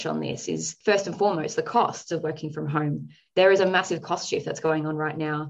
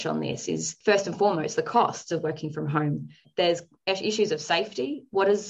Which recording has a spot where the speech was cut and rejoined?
second; 1 cut; at 3.2 s

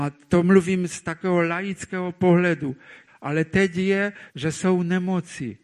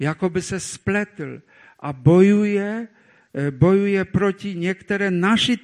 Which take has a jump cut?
first; 2 cuts; at 3.1 s, 4.3 s

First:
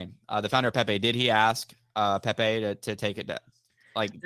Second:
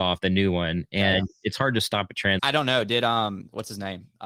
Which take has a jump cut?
second; 1 cut; at 2.4 s

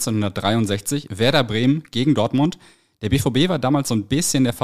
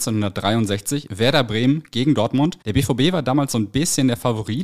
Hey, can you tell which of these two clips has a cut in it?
second; 1 cut; at 2.6 s

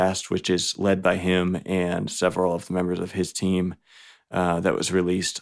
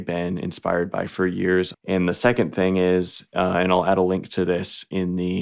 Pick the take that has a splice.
second; 1 cut; at 1.7 s

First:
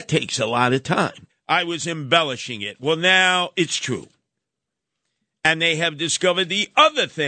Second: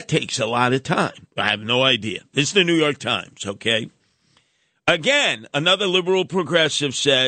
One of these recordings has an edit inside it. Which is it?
first; 1 cut; at 1.3 s

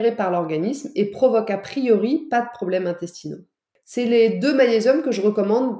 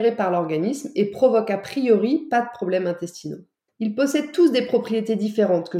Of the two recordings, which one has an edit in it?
second; 1 cut; at 3.7 s

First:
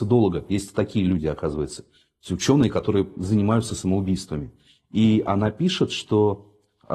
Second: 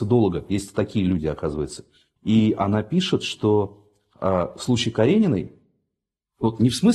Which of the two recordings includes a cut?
second; 1 cut; at 2.2 s

